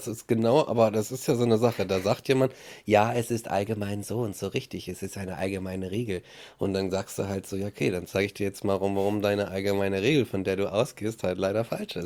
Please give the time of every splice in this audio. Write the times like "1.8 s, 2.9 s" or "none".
none